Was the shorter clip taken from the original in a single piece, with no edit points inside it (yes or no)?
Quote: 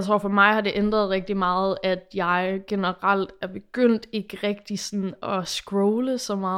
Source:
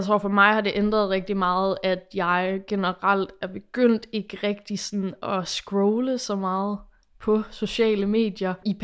yes